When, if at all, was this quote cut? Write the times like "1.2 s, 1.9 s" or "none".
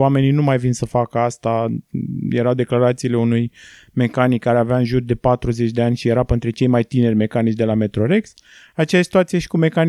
none